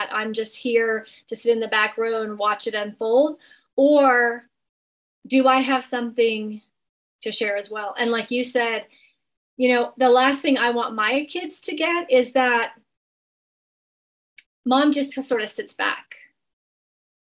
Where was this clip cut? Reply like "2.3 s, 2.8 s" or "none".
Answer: 14.5 s

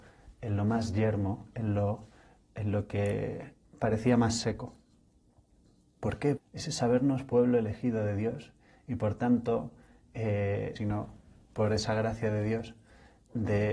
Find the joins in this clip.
6.4 s, 10.8 s

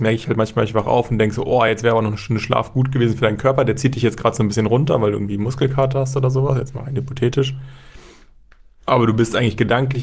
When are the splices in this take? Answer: none

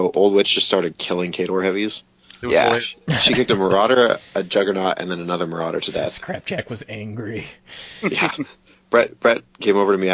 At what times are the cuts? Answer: 2.4 s

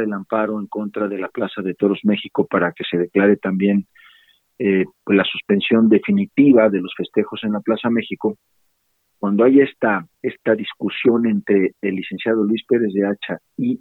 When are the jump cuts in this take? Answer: 10.1 s

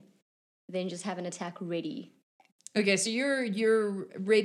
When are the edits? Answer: none

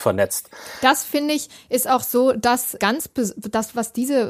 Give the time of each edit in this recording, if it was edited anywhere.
2.8 s

